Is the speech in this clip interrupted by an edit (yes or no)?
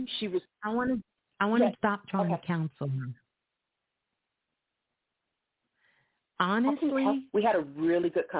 yes